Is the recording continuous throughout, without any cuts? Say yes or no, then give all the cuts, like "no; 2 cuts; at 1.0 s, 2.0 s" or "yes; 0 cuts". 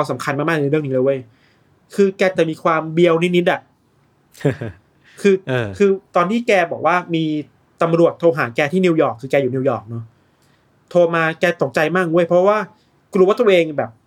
yes; 0 cuts